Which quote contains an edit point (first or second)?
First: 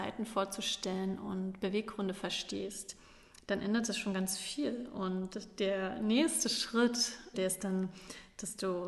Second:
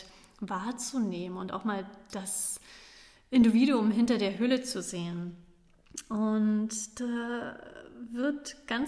first